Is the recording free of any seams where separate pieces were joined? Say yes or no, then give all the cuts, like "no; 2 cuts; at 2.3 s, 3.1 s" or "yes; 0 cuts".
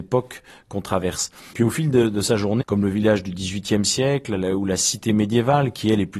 no; 2 cuts; at 1.5 s, 2.6 s